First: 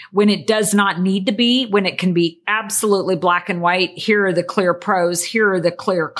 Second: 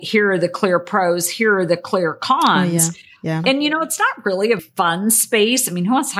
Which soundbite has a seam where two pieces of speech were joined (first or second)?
second